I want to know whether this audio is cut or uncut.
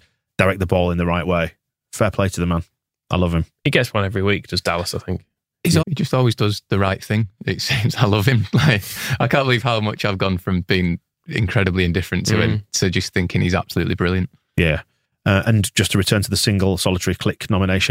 cut